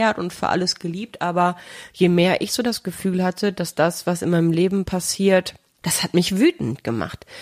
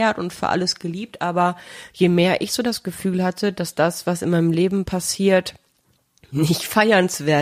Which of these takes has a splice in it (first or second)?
first